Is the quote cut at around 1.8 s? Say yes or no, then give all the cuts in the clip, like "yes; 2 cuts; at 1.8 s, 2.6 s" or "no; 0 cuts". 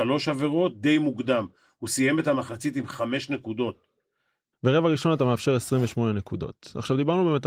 no; 1 cut; at 4.5 s